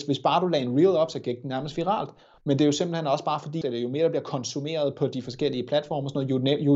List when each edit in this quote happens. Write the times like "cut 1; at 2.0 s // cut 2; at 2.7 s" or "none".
cut 1; at 2.4 s // cut 2; at 3.6 s